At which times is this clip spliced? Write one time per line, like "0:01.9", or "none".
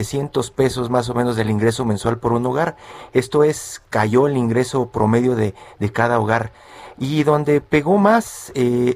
none